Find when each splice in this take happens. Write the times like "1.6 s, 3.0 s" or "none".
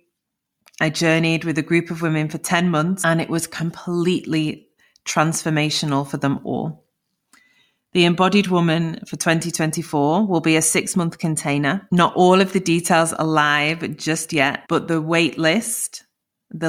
none